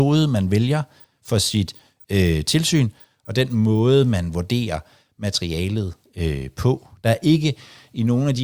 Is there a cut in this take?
no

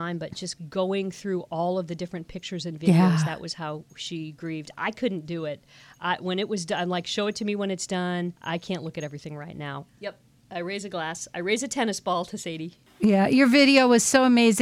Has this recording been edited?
yes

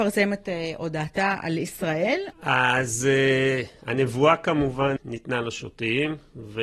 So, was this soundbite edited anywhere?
yes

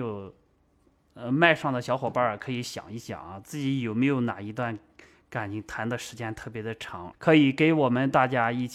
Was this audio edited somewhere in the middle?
yes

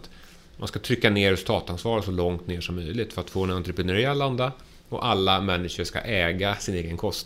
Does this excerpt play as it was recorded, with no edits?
yes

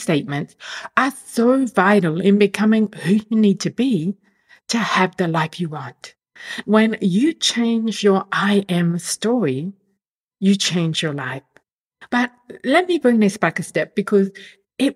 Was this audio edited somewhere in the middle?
yes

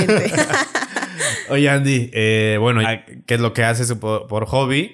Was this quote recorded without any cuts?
no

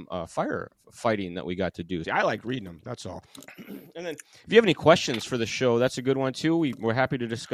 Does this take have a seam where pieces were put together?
yes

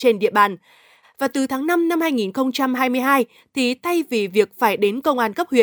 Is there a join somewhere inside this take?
yes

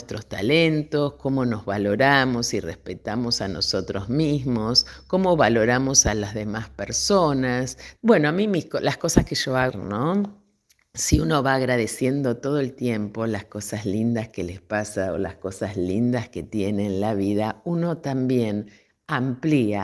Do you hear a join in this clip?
yes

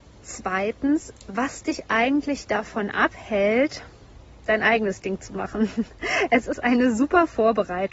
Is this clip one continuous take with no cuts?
yes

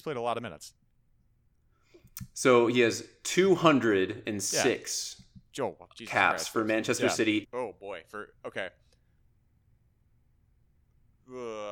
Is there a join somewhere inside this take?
yes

